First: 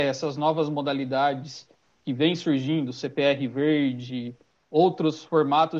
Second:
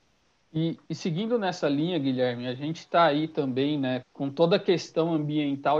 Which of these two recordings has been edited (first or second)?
second